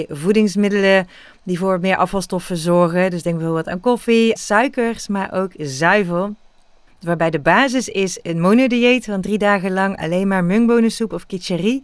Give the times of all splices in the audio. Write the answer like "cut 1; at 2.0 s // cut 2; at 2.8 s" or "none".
cut 1; at 4.4 s // cut 2; at 6.9 s